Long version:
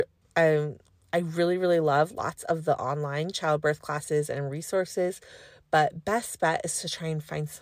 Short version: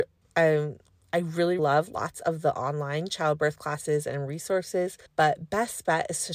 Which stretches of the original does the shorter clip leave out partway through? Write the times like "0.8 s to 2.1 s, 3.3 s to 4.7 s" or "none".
1.6 s to 1.8 s, 5.3 s to 5.6 s